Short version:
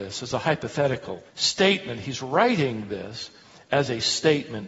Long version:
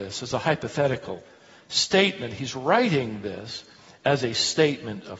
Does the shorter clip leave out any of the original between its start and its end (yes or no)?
yes